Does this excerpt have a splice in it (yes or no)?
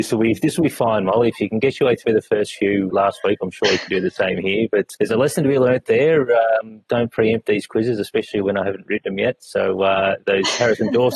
yes